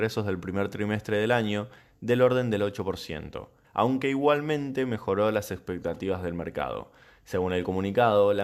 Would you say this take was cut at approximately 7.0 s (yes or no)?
no